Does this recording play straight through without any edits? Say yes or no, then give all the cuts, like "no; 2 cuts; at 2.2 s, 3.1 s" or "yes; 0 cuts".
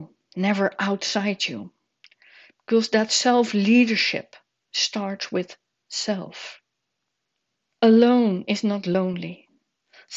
yes; 0 cuts